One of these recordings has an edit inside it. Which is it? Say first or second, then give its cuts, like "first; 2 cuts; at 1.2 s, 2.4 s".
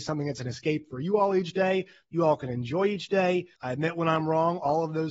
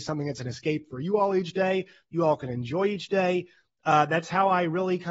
first; 1 cut; at 3.6 s